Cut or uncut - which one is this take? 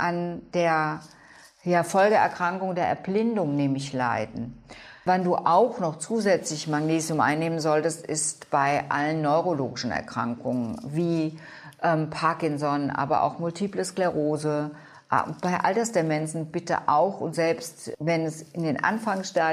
uncut